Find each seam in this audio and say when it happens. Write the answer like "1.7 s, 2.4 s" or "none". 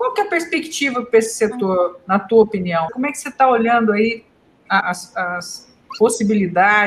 2.9 s, 4.8 s